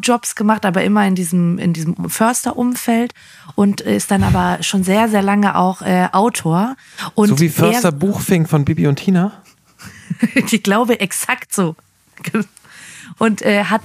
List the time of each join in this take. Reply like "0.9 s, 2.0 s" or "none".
none